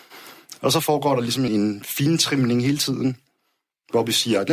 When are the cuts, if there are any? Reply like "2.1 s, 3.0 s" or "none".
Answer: 1.5 s